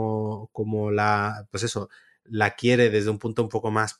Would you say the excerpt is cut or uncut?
uncut